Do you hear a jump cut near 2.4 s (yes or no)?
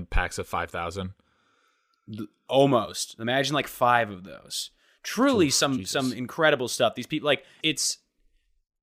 no